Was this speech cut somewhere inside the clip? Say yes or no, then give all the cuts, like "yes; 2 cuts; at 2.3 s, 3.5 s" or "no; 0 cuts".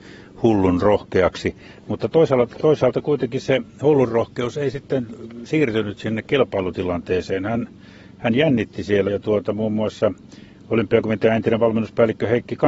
yes; 1 cut; at 9.1 s